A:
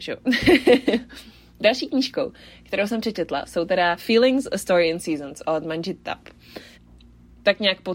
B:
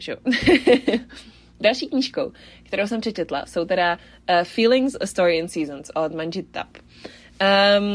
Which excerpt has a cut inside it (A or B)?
A